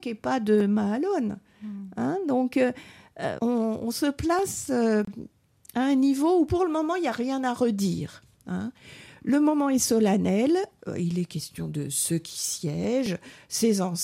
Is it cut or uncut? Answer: cut